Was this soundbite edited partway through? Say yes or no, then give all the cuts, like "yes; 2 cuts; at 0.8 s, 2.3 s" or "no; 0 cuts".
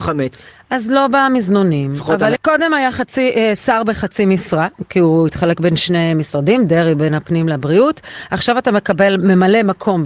yes; 1 cut; at 2.4 s